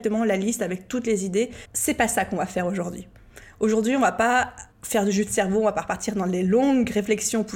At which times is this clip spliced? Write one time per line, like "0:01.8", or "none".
0:01.7
0:04.7